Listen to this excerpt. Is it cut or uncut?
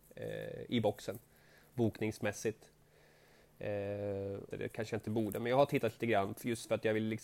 cut